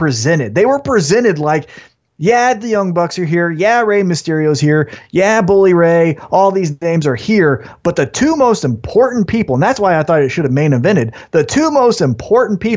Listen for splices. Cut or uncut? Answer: uncut